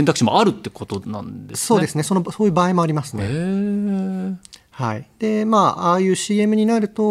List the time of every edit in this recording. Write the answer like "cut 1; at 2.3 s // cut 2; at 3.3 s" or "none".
none